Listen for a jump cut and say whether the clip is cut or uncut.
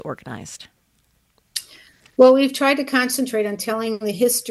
uncut